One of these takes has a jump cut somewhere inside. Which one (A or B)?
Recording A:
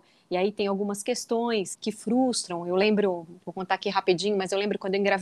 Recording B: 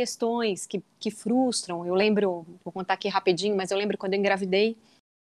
A